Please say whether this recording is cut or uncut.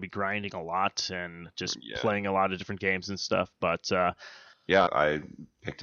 cut